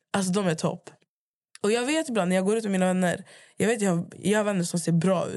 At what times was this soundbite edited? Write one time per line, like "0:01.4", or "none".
none